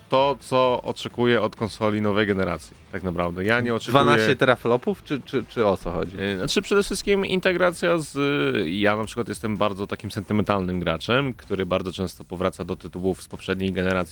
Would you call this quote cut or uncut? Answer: uncut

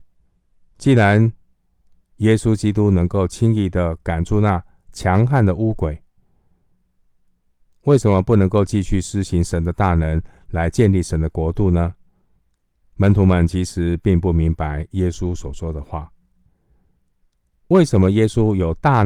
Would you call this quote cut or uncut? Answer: cut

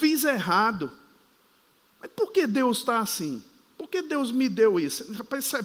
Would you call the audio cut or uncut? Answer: uncut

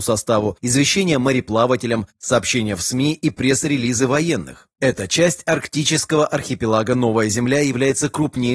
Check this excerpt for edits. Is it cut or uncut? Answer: cut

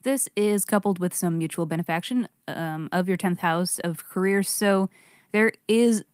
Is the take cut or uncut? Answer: uncut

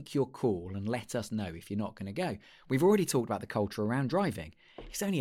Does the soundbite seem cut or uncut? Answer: uncut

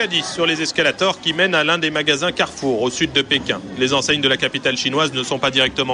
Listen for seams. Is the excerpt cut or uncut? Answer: uncut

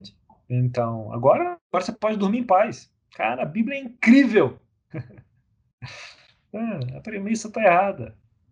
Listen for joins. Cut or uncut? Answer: cut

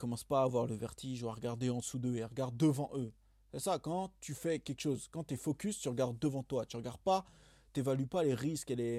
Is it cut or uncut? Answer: uncut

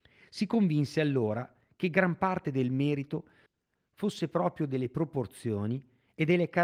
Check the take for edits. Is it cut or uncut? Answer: uncut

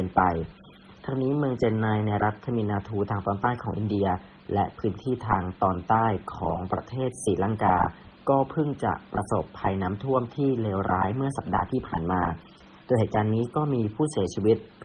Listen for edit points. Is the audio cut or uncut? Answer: uncut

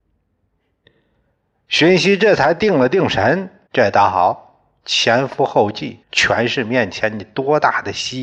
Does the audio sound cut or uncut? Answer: cut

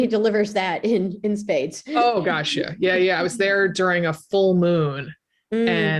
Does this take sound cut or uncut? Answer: uncut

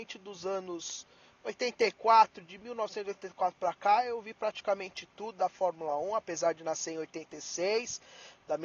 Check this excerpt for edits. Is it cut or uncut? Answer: uncut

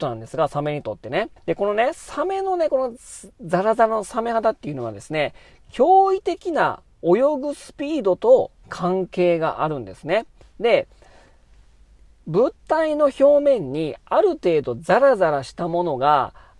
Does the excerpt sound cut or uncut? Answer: cut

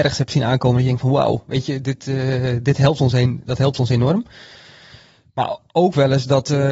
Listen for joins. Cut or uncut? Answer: uncut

